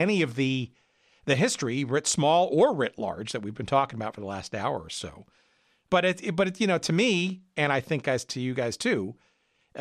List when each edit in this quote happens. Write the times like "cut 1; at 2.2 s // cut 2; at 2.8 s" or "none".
none